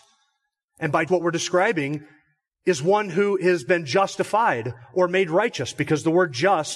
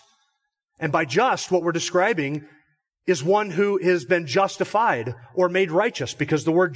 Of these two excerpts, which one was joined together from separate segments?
first; 1 cut; at 1.1 s

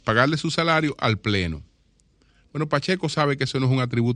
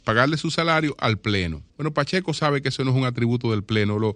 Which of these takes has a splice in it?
second; 1 cut; at 1.7 s

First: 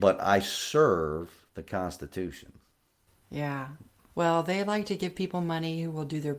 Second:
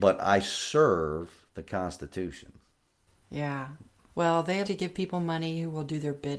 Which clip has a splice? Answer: second; 1 cut; at 4.6 s

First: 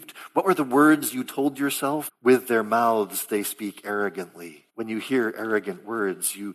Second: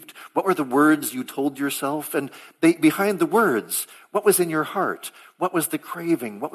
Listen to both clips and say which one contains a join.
first; 2 cuts; at 2.1 s, 4.7 s

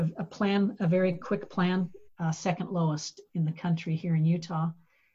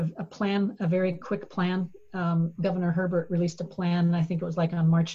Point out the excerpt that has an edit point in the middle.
first; 1 cut; at 2.1 s

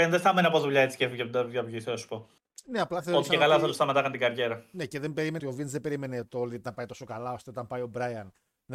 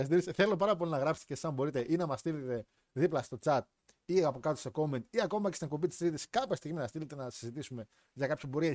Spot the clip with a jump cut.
first; 1 cut; at 5.4 s

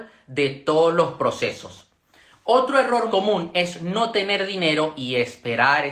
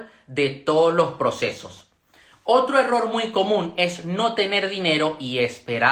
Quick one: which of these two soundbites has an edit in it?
first; 1 cut; at 3.1 s

